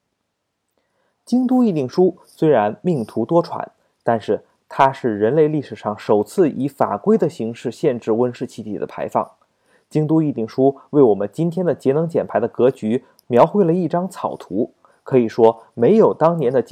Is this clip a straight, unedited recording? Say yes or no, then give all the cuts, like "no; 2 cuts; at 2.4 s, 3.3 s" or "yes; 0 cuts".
yes; 0 cuts